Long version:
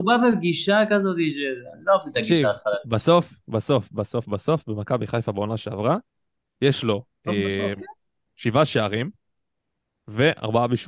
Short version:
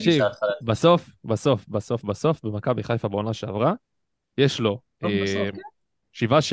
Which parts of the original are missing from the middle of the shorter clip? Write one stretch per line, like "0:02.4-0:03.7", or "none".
none